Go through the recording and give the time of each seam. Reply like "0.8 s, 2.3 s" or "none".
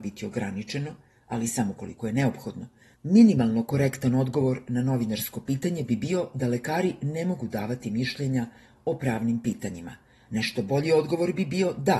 2.9 s